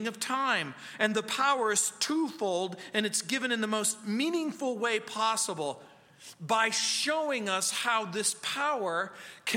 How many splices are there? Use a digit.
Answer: 0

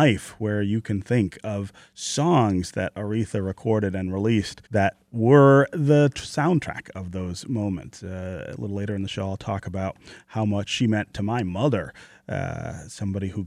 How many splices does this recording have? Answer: 1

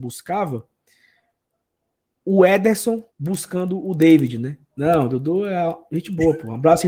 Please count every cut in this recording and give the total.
2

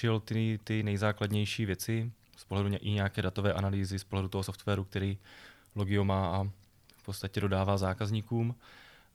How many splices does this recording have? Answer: 0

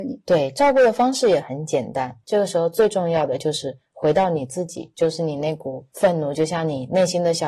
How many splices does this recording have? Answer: 2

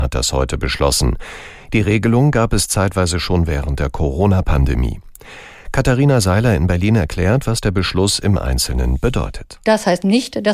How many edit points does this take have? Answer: 0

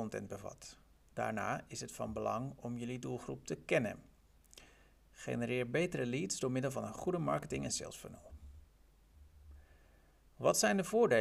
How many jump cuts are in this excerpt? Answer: 0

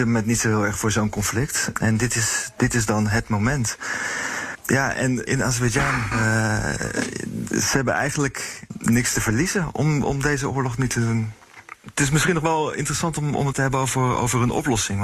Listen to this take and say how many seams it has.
1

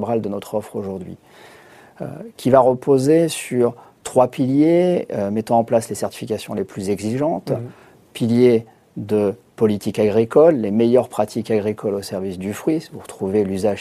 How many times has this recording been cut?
0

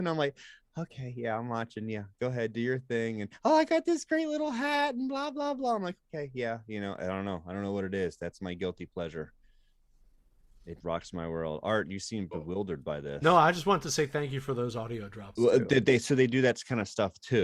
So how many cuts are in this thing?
2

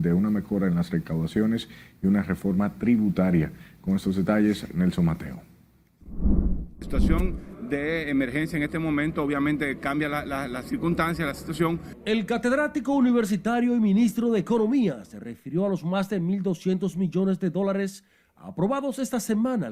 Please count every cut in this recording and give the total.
0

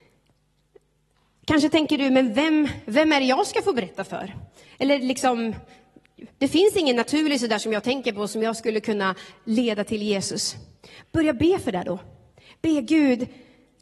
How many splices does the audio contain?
0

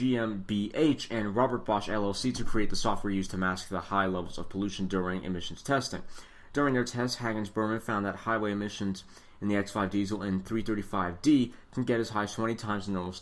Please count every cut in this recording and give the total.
0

